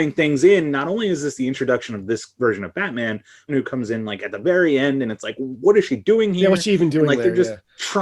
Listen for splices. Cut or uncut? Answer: cut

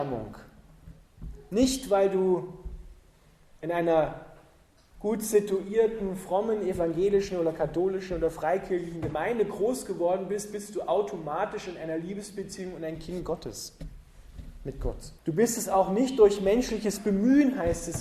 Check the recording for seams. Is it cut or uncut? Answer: cut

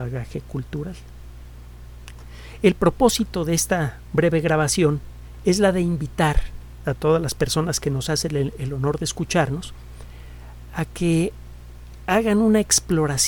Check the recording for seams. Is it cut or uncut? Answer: uncut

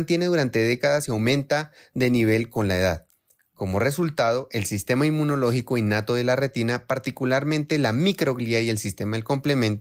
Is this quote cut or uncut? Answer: uncut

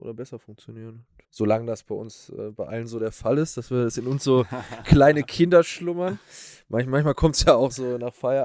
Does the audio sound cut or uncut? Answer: cut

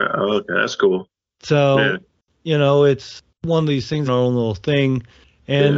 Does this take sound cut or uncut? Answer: cut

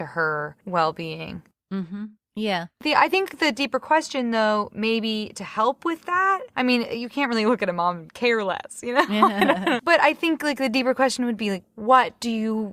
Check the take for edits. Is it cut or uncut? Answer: cut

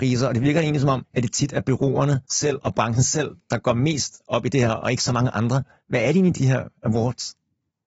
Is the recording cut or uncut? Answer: cut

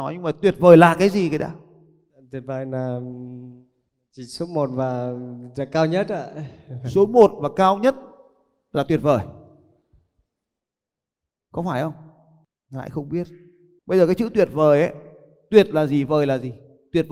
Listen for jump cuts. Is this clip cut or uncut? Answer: cut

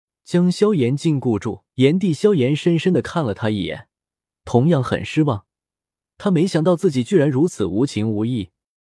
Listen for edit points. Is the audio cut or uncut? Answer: cut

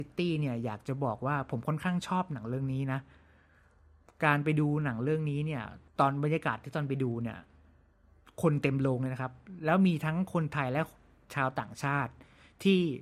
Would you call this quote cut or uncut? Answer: cut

